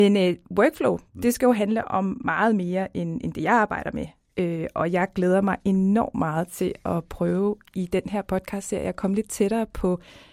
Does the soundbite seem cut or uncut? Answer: uncut